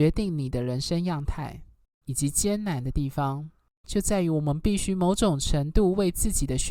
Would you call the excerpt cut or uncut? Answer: cut